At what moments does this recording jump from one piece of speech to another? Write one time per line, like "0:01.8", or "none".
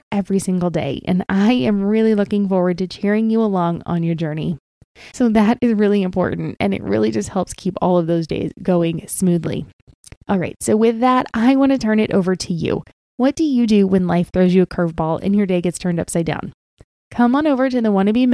0:05.1